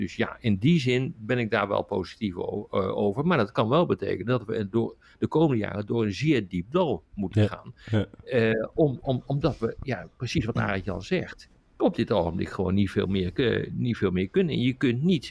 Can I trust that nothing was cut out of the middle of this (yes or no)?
yes